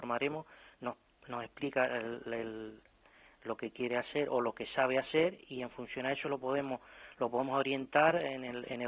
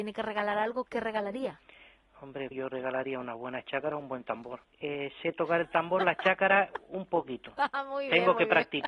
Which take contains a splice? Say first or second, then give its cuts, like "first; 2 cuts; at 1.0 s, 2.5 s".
second; 2 cuts; at 2.5 s, 4.6 s